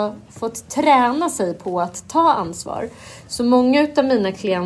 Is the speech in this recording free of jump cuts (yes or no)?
yes